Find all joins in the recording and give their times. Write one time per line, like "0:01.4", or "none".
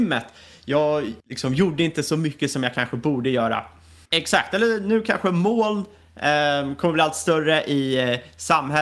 0:01.2
0:04.0